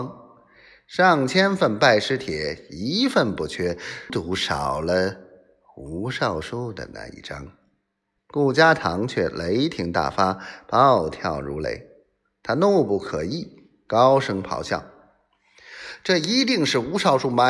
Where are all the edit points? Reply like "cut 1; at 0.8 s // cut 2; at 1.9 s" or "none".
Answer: cut 1; at 4.1 s // cut 2; at 8.2 s